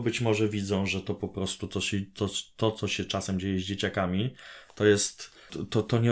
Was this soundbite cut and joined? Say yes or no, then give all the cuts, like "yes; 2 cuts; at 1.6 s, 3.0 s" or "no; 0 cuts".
no; 0 cuts